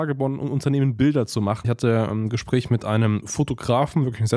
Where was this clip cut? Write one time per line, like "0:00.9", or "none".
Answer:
0:01.6